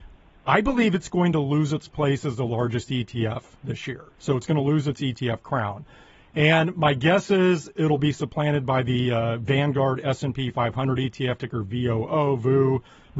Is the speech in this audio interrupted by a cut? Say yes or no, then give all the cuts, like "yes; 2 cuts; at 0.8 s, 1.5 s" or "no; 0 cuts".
no; 0 cuts